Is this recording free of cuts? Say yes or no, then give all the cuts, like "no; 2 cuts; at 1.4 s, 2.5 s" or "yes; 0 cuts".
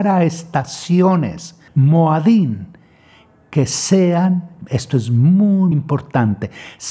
no; 2 cuts; at 1.7 s, 5.7 s